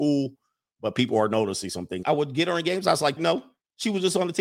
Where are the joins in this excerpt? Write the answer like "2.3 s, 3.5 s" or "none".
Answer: 2.0 s, 3.2 s